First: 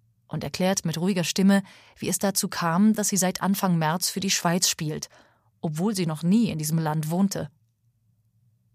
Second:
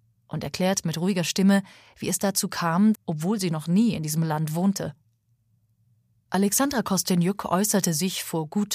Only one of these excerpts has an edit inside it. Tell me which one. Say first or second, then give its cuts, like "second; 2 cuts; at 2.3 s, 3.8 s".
second; 2 cuts; at 2.9 s, 6.2 s